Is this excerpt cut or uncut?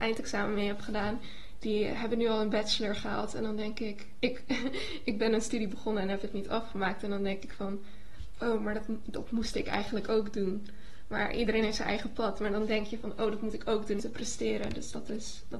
cut